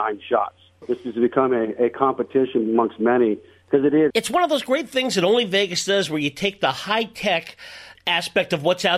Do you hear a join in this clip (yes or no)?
yes